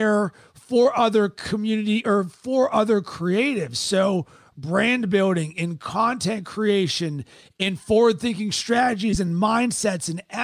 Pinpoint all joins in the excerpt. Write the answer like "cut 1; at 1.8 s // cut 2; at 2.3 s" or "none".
none